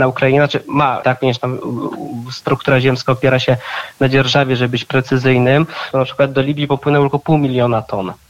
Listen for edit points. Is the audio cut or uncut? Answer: cut